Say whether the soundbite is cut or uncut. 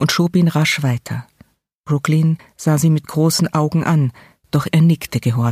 cut